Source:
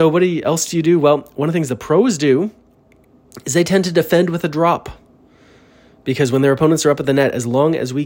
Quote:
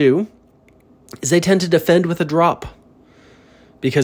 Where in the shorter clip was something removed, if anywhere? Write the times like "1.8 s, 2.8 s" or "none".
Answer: none